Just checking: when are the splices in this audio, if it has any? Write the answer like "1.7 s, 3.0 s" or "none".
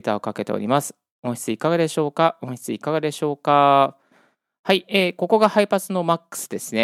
none